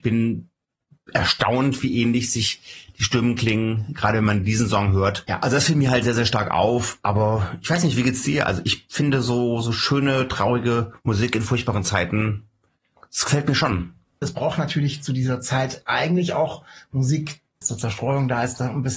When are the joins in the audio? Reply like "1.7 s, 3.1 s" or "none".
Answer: 14.2 s, 17.6 s